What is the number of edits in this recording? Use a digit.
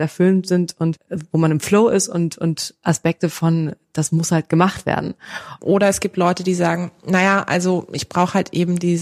1